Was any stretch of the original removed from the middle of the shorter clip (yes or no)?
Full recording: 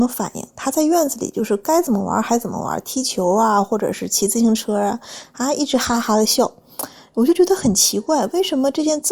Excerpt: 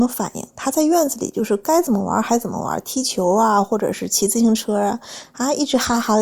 no